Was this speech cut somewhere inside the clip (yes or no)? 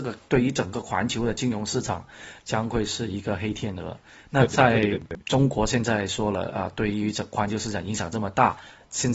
no